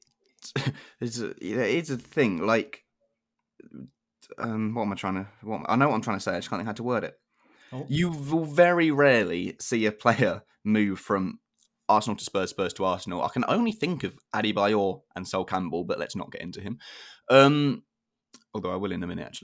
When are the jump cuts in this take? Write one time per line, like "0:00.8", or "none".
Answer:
none